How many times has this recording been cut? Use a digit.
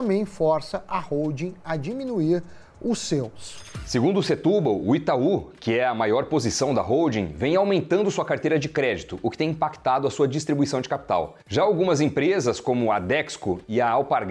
1